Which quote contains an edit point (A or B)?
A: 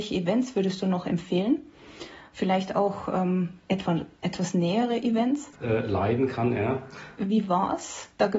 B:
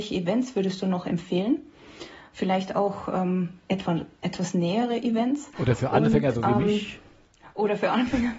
A